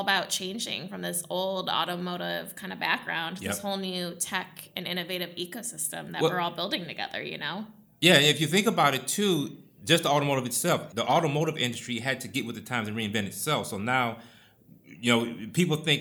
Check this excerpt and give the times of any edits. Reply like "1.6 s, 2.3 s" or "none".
none